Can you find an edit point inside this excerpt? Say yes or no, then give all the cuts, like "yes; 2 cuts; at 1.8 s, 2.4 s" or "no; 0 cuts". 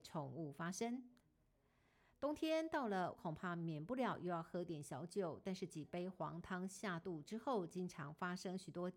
yes; 1 cut; at 3.1 s